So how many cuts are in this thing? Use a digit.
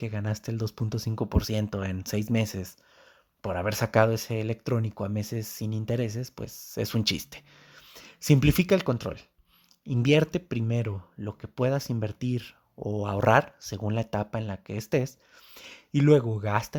0